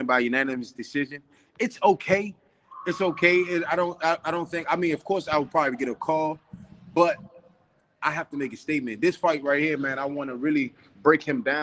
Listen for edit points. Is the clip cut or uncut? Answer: uncut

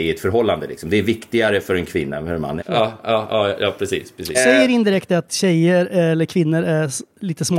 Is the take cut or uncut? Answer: cut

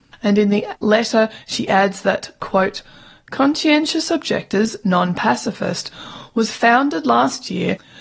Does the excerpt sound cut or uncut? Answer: uncut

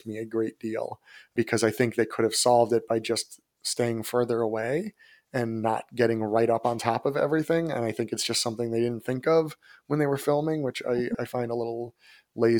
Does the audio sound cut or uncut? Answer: uncut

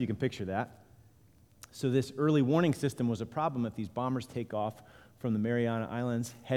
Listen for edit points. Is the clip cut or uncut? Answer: uncut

